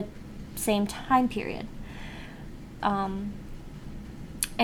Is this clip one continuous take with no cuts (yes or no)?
no